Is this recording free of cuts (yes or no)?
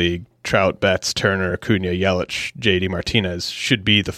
yes